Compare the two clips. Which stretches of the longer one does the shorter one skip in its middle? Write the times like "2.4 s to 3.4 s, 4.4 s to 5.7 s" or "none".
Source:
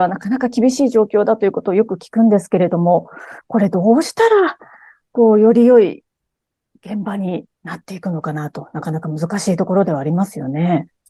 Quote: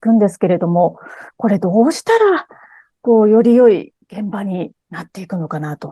6.1 s to 6.8 s